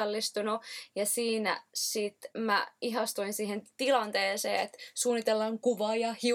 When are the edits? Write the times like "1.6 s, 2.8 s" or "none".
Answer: 2.3 s